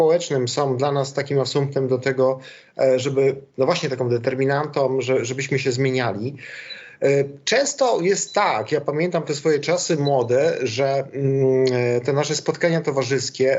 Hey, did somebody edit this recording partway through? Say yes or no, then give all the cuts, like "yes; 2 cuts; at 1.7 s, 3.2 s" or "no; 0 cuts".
no; 0 cuts